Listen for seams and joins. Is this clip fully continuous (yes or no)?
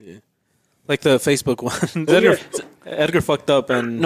no